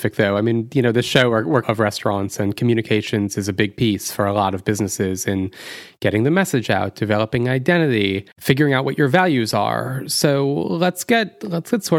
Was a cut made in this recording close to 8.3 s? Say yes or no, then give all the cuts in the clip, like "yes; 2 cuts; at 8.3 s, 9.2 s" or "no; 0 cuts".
yes; 2 cuts; at 1.6 s, 8.3 s